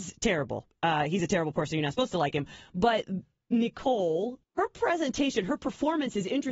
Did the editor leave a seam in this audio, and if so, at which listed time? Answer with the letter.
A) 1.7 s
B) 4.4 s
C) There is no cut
B